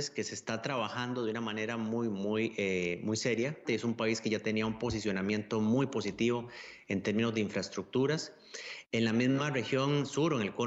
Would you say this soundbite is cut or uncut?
cut